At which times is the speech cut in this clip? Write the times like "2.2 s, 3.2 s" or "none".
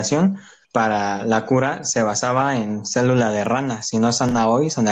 none